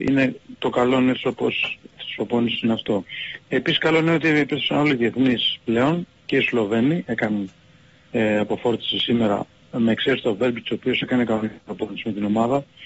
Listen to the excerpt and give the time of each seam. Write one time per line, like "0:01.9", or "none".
none